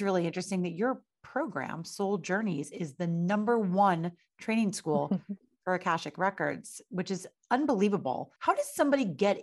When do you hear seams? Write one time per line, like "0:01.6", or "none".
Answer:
0:08.4